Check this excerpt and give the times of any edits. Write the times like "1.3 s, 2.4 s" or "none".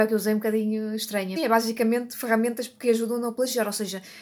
1.4 s